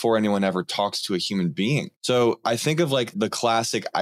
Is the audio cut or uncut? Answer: cut